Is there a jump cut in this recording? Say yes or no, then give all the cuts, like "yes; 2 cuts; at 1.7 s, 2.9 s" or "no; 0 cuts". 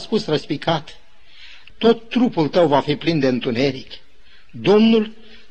yes; 1 cut; at 1.7 s